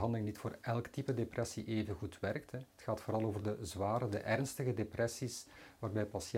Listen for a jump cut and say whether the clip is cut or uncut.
uncut